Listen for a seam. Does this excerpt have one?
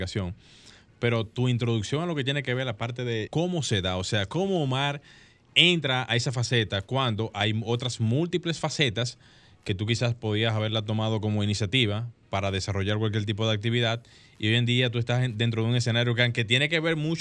yes; 1 cut; at 3.3 s

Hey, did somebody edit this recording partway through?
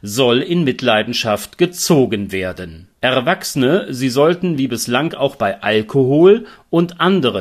no; 0 cuts

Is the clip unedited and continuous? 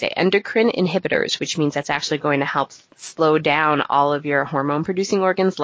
no; 1 cut; at 2.9 s

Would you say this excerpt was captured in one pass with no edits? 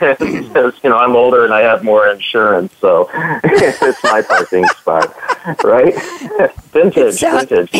yes; 0 cuts

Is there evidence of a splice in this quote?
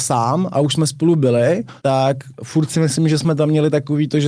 yes; 1 cut; at 1.8 s

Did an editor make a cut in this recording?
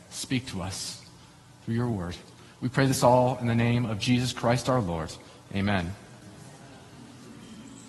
no; 0 cuts

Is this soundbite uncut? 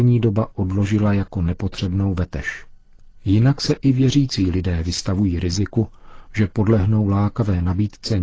yes; 0 cuts

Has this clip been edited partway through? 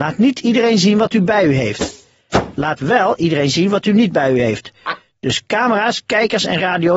no; 0 cuts

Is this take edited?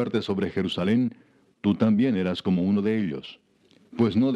no; 0 cuts

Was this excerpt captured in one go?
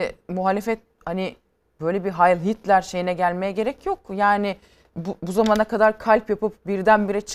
yes; 0 cuts

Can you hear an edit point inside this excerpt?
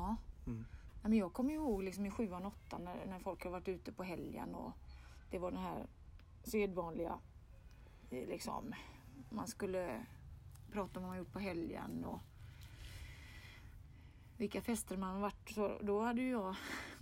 no; 0 cuts

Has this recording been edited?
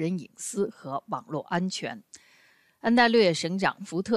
no; 0 cuts

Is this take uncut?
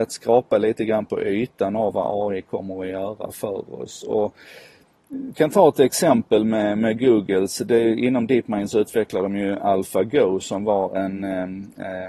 yes; 0 cuts

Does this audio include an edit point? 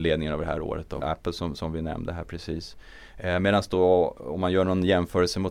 yes; 1 cut; at 1.0 s

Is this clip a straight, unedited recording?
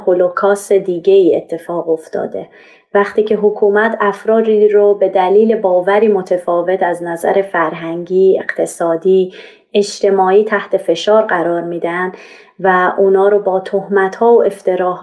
yes; 0 cuts

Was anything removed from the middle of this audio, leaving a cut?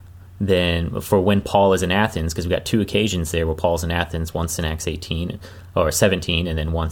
no; 0 cuts

